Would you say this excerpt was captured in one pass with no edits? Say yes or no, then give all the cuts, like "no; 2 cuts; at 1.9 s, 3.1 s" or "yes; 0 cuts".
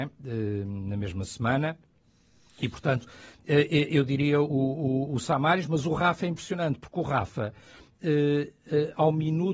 yes; 0 cuts